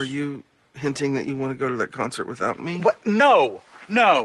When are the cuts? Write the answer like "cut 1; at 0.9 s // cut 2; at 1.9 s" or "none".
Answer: none